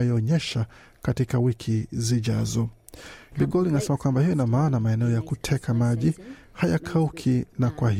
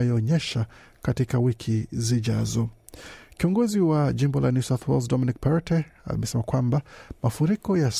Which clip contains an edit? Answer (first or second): first